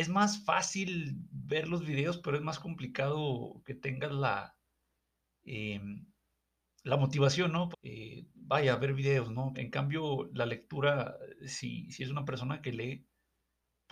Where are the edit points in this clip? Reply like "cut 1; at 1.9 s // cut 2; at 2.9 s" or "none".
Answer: cut 1; at 7.7 s // cut 2; at 9.5 s

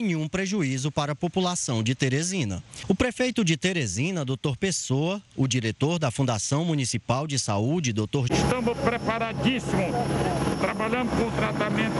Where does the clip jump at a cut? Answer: cut 1; at 8.3 s // cut 2; at 10.5 s

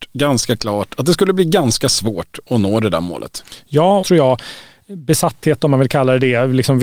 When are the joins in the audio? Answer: cut 1; at 4.0 s

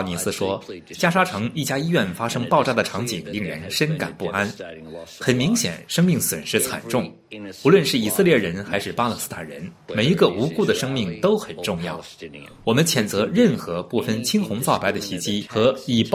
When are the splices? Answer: none

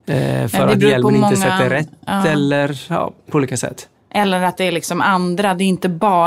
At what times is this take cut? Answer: none

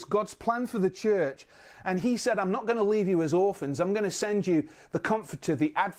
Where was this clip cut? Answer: none

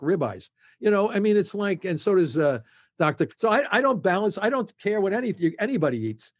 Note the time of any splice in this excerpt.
cut 1; at 3.3 s

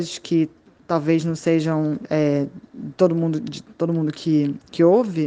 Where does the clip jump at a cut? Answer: none

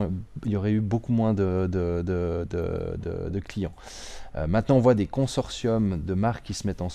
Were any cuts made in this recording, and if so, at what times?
none

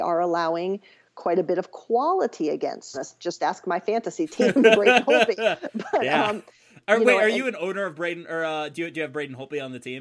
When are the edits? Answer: cut 1; at 2.9 s

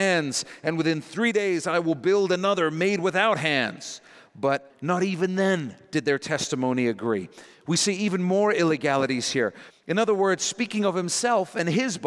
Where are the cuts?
cut 1; at 4.7 s // cut 2; at 9.7 s

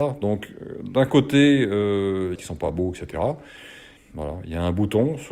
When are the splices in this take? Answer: cut 1; at 2.4 s // cut 2; at 4.0 s

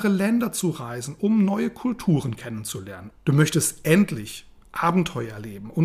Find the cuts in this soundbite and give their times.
cut 1; at 3.1 s

